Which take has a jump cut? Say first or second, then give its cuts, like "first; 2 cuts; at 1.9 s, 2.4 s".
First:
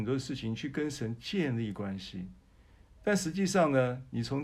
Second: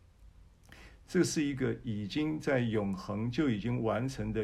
second; 1 cut; at 1.1 s